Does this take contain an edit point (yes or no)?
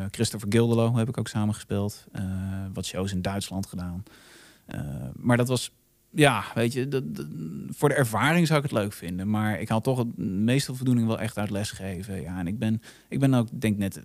no